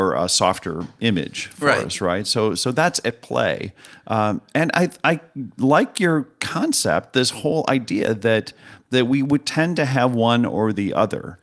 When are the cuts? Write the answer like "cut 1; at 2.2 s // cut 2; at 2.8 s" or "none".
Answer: none

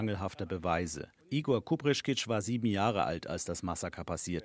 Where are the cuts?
cut 1; at 1.2 s

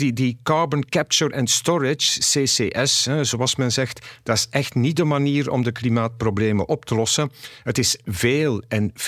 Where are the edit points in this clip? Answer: none

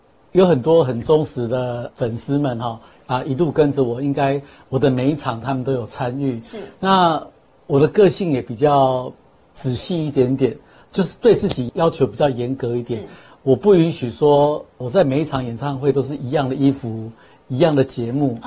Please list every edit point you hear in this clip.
none

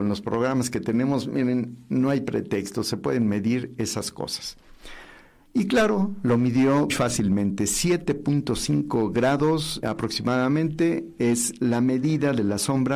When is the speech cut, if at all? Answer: cut 1; at 6.9 s // cut 2; at 9.8 s

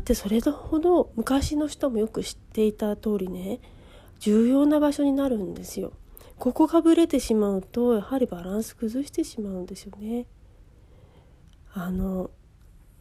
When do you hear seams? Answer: none

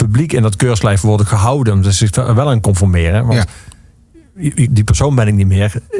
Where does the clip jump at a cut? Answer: cut 1; at 4.7 s

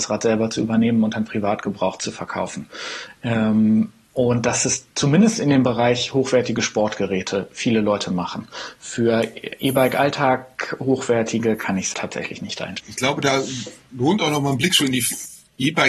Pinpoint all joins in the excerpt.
cut 1; at 11.9 s

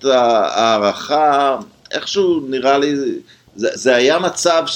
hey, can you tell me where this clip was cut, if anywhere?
cut 1; at 3.8 s

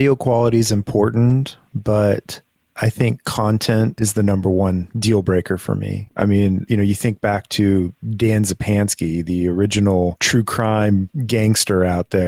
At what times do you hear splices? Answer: none

